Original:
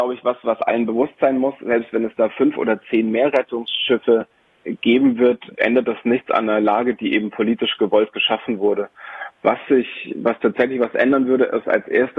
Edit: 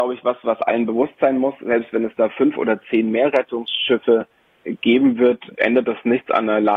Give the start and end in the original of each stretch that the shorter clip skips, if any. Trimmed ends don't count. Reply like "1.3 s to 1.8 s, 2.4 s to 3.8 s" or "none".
none